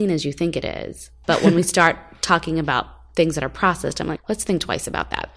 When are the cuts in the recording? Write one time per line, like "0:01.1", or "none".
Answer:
0:01.2
0:04.2